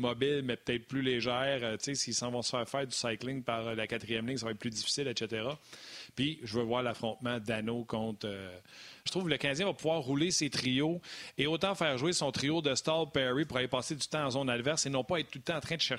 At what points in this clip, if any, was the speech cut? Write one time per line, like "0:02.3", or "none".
0:09.1